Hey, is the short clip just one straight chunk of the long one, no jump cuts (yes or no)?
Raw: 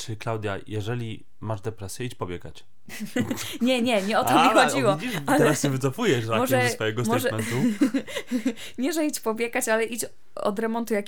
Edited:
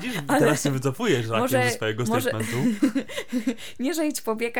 yes